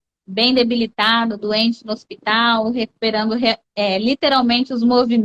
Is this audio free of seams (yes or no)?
yes